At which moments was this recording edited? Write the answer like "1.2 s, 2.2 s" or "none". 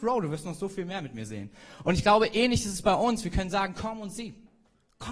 none